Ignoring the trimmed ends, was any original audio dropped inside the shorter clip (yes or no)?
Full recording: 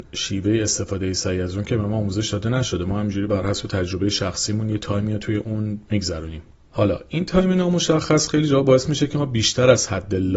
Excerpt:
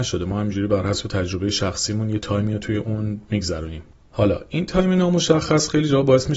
no